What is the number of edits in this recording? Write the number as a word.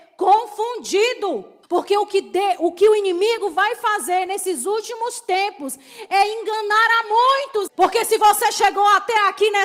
two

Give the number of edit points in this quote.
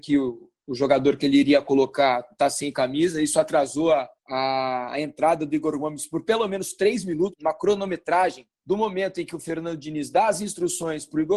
three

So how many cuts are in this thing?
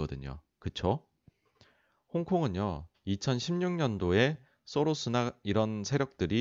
one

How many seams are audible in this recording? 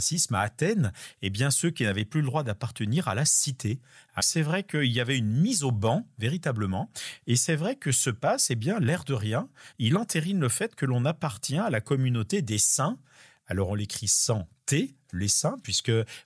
two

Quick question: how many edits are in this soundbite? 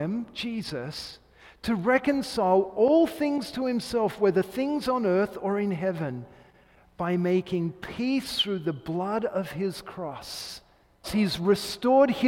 one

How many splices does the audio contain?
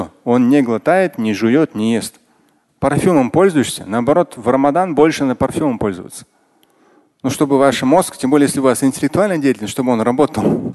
one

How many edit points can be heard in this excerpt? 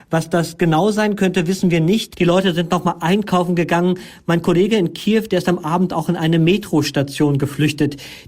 one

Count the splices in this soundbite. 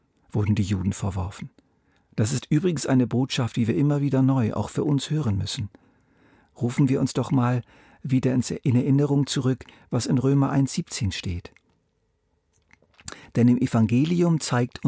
one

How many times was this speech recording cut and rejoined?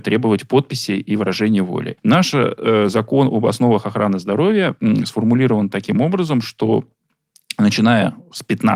one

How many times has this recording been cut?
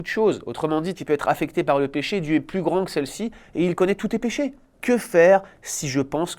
two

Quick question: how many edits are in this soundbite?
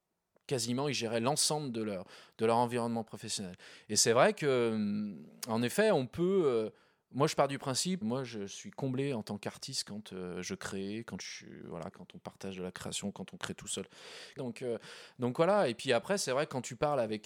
three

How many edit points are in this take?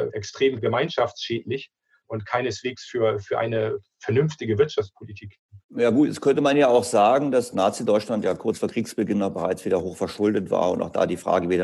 one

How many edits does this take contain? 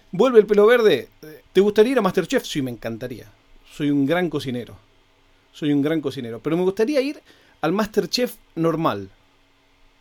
one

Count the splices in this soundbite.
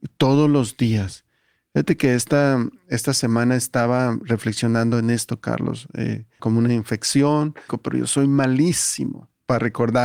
two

